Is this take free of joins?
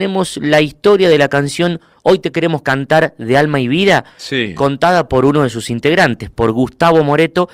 yes; 0 cuts

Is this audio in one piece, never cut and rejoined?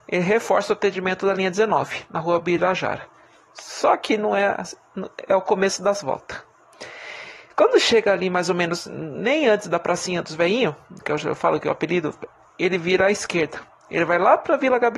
yes; 0 cuts

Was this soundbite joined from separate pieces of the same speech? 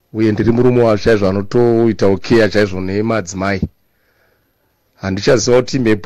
no; 0 cuts

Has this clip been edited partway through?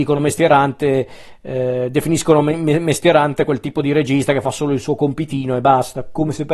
no; 0 cuts

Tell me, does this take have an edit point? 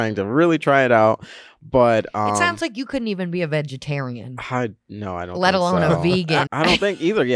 yes; 1 cut; at 6.5 s

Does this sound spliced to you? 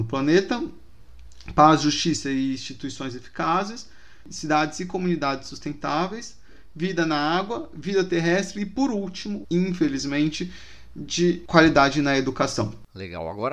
yes; 1 cut; at 9.4 s

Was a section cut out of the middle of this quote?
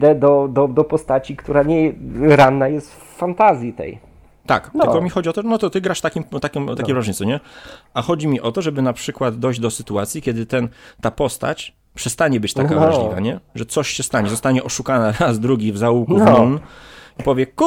no; 0 cuts

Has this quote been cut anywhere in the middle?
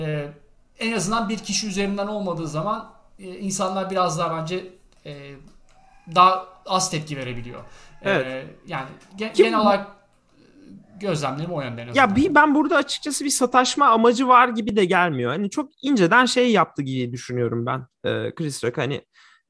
no; 0 cuts

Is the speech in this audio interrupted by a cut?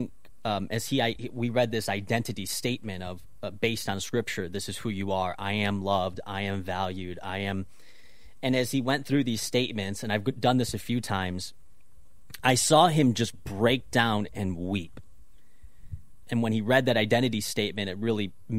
yes; 1 cut; at 16.2 s

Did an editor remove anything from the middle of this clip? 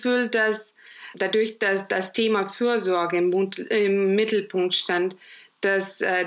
no; 0 cuts

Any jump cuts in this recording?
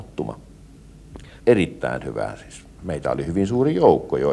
yes; 2 cuts; at 1.4 s, 2.8 s

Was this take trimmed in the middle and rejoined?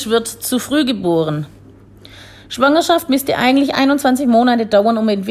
no; 0 cuts

